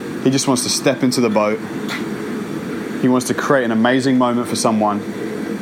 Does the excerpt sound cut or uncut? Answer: uncut